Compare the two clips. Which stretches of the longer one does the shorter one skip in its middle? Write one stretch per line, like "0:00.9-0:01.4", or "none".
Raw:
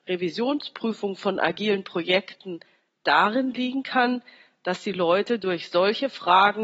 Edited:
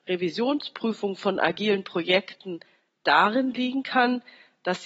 none